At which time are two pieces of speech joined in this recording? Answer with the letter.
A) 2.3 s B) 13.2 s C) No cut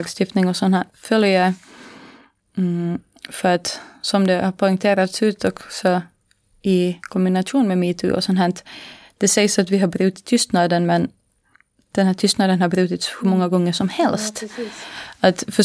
C